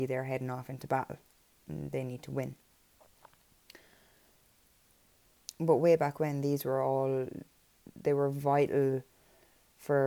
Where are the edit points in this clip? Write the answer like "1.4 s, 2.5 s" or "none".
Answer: none